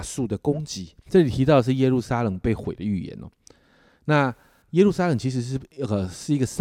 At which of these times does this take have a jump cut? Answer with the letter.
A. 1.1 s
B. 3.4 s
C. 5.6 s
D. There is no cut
A